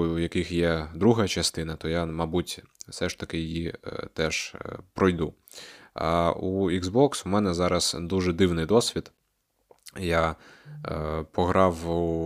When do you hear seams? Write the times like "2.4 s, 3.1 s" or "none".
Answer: none